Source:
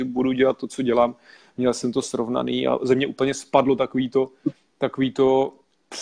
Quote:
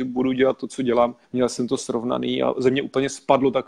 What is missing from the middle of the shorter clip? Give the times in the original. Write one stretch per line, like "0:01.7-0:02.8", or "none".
0:01.2-0:01.5